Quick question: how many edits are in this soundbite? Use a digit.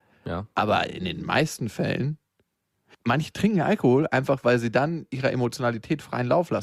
0